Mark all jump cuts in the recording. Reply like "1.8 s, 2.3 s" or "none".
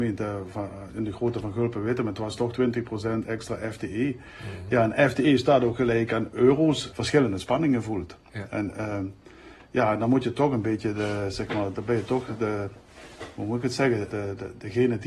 6.9 s, 14.1 s